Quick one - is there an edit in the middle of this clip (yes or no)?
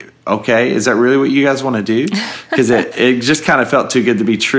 yes